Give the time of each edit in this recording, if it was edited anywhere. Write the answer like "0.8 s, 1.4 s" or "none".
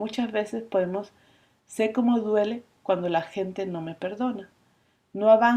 1.6 s